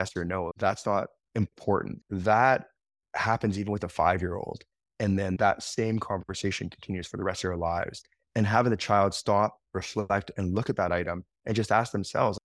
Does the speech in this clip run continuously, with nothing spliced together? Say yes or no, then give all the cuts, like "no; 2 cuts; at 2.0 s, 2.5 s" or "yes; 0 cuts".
no; 2 cuts; at 2.0 s, 8.3 s